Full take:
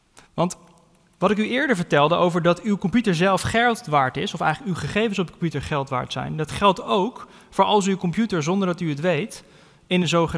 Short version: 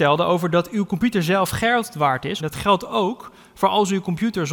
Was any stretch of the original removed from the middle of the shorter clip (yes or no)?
yes